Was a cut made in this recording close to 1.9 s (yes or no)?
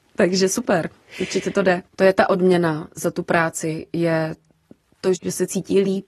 yes